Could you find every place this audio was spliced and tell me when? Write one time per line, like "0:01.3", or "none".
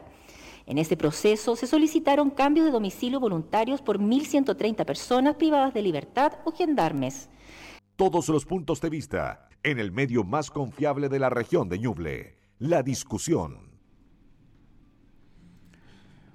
0:07.8
0:09.5